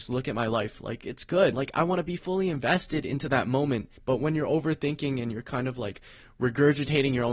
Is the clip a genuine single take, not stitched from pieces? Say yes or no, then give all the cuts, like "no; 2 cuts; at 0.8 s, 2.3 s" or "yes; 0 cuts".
no; 2 cuts; at 1.5 s, 4.0 s